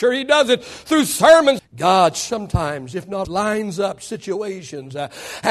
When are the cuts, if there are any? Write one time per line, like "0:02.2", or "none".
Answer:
0:01.6
0:03.2